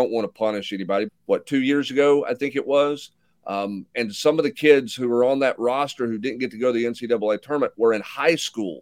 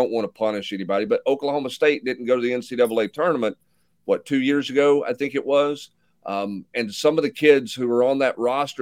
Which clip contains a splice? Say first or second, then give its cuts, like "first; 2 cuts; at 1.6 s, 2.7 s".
first; 1 cut; at 1.1 s